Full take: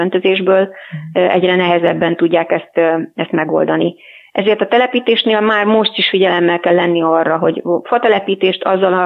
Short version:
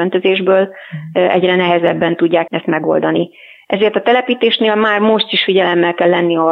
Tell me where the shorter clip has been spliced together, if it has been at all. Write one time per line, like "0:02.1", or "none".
0:02.5